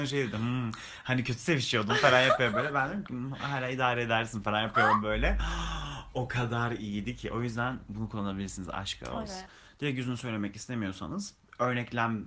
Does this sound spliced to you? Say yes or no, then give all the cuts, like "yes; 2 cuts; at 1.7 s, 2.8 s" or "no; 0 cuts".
yes; 1 cut; at 9.5 s